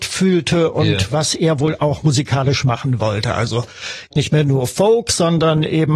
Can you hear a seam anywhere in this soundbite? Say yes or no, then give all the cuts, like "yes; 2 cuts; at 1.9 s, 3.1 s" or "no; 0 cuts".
no; 0 cuts